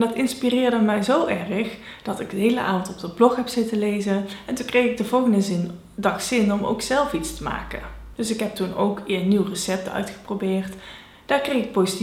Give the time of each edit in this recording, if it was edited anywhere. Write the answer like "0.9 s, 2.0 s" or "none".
none